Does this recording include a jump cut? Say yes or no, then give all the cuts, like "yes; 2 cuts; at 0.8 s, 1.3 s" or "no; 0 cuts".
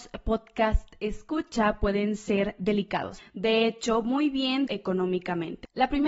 yes; 2 cuts; at 3.2 s, 4.7 s